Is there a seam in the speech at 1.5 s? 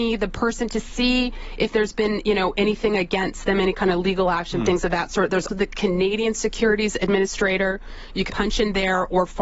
no; 2 cuts; at 5.5 s, 8.3 s

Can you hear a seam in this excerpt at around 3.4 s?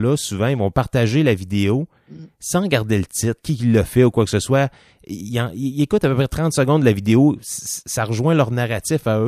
yes; 1 cut; at 3.4 s

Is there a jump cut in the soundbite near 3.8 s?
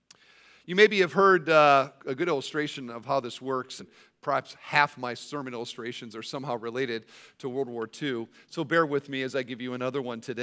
yes; 2 cuts; at 2.0 s, 3.8 s

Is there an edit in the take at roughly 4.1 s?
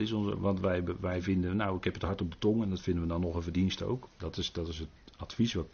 yes; 1 cut; at 4.1 s

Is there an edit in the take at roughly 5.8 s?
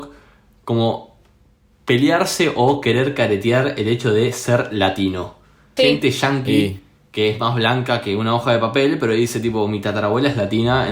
yes; 1 cut; at 5.8 s

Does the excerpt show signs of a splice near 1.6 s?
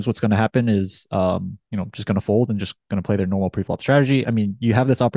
yes; 2 cuts; at 1.6 s, 4.2 s

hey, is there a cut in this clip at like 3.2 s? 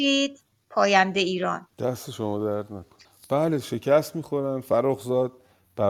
no; 1 cut; at 1.7 s

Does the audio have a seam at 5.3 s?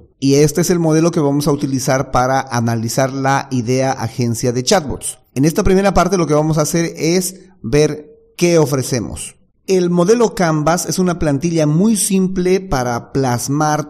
no; 1 cut; at 9.5 s

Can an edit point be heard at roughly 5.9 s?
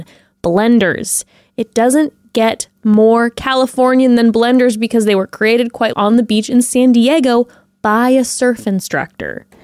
yes; 1 cut; at 5.9 s

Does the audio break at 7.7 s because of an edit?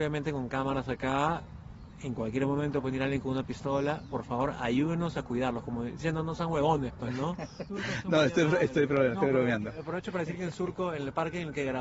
yes; 1 cut; at 7.7 s

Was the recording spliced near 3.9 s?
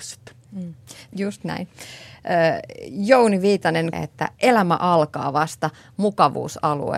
yes; 2 cuts; at 1.1 s, 3.9 s

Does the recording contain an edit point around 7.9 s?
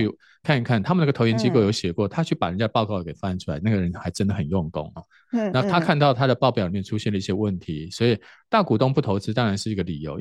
no; 0 cuts

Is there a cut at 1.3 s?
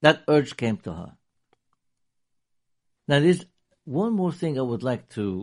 no; 1 cut; at 3.0 s

